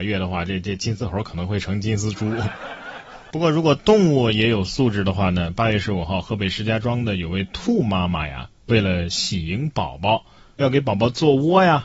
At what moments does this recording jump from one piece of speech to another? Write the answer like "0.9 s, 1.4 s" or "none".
none